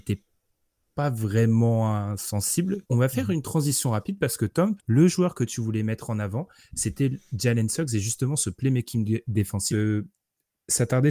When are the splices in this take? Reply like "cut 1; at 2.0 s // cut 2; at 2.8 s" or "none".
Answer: cut 1; at 2.8 s // cut 2; at 4.8 s // cut 3; at 9.7 s